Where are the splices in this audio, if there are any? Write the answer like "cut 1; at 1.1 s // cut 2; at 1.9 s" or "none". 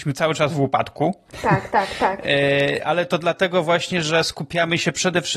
none